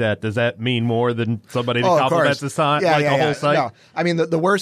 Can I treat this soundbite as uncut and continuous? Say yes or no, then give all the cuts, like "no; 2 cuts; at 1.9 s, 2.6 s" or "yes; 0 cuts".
yes; 0 cuts